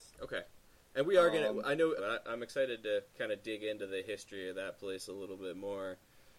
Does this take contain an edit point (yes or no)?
yes